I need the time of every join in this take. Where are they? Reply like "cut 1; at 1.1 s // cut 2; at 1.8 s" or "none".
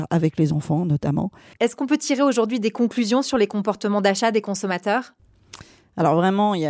cut 1; at 1.5 s